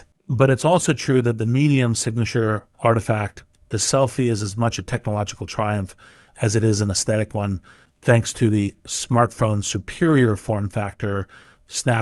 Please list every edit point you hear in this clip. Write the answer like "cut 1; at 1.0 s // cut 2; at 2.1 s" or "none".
none

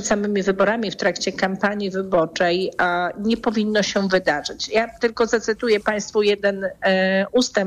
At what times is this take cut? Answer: none

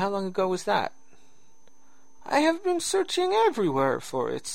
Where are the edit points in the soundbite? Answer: cut 1; at 2.2 s

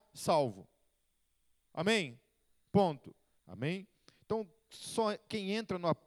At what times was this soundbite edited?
cut 1; at 3.4 s

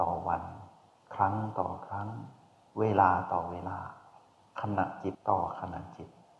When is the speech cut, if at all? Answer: cut 1; at 5.1 s

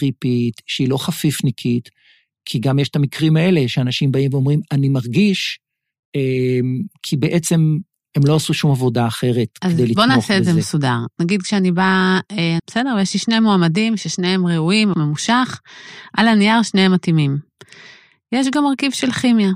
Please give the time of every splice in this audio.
cut 1; at 11.2 s // cut 2; at 12.6 s // cut 3; at 14.9 s

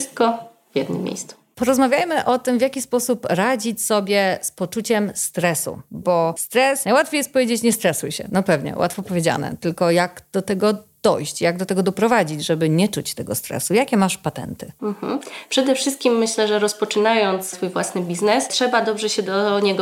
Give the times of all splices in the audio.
none

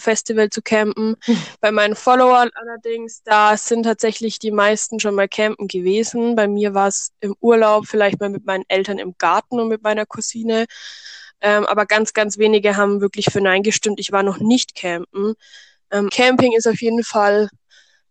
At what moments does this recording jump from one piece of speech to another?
cut 1; at 16.1 s

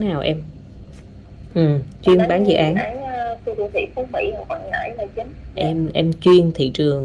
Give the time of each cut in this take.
cut 1; at 1.5 s // cut 2; at 5.6 s

